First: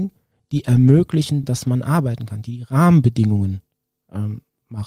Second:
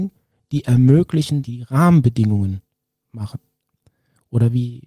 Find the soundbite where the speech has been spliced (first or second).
second